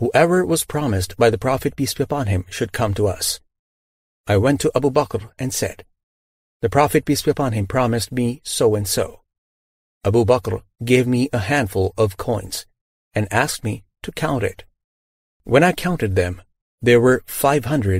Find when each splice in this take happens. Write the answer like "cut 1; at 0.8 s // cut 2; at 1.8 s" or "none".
none